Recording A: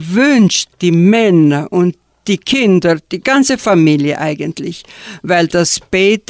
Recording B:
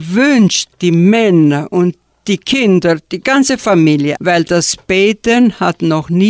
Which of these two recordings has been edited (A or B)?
B